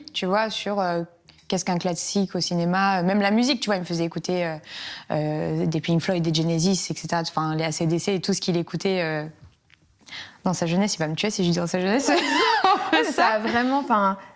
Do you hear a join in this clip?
no; 0 cuts

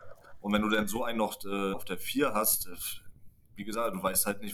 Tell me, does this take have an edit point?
yes; 1 cut; at 1.7 s

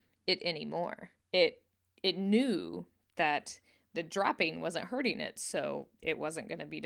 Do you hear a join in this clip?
yes; 1 cut; at 1.2 s

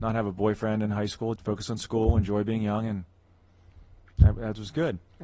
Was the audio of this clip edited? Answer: yes; 1 cut; at 1.4 s

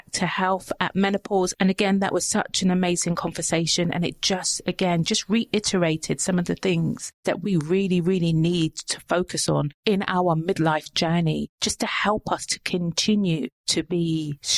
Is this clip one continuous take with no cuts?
yes; 0 cuts

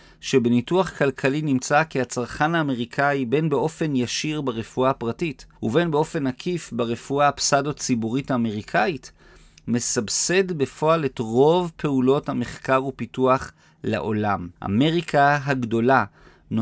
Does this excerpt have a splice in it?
yes; 2 cuts; at 5.5 s, 14.6 s

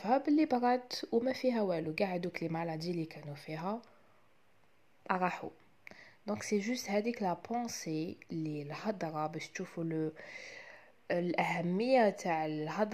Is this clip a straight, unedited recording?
yes; 0 cuts

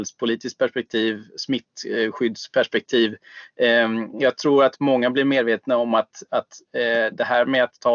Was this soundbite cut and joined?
no; 0 cuts

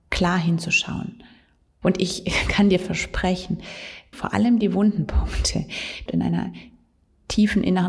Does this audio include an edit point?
yes; 2 cuts; at 4.1 s, 6.1 s

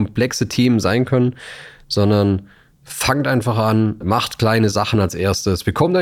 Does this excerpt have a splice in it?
no; 0 cuts

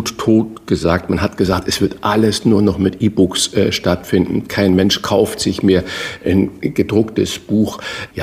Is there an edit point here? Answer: no; 0 cuts

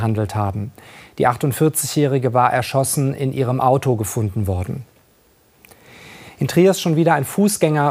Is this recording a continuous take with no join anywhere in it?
yes; 0 cuts

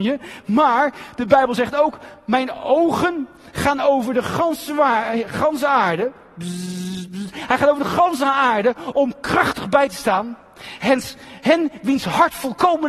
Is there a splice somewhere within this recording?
yes; 1 cut; at 7.1 s

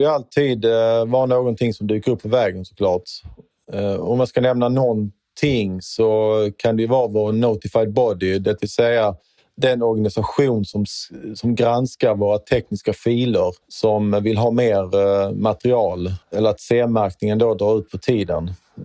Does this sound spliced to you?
yes; 2 cuts; at 13.6 s, 16.2 s

